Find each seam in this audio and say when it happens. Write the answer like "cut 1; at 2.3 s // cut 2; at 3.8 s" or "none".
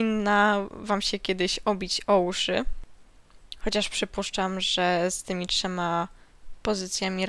none